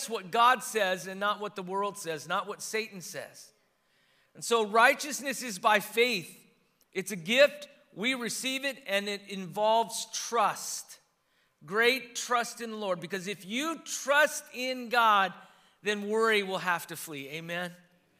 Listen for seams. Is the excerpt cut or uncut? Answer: uncut